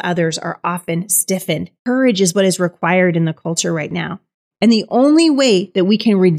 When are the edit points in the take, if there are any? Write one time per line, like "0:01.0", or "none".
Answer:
0:01.8
0:04.5

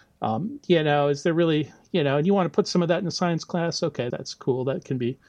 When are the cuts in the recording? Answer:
0:04.1

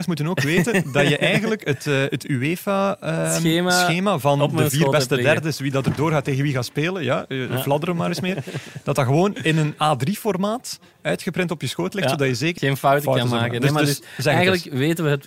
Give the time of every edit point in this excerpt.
0:12.6

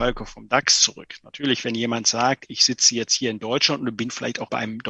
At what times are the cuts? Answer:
none

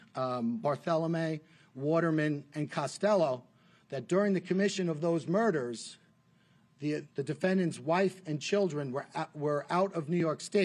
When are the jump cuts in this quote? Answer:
0:07.0

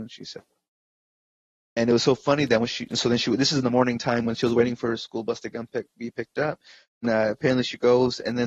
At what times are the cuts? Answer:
0:07.0

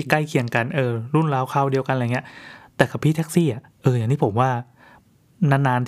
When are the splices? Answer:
0:03.7

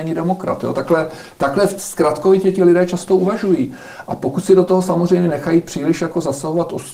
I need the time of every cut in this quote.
0:05.3

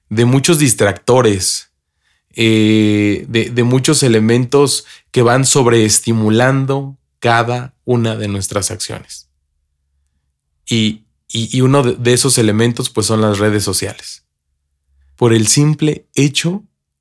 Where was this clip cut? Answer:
0:15.1

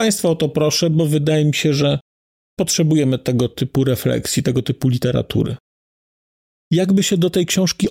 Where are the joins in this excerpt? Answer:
0:06.5

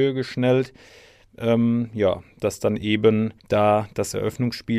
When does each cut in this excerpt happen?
0:03.4

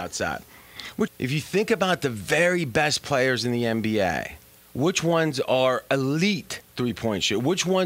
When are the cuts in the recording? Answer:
0:01.1
0:04.6

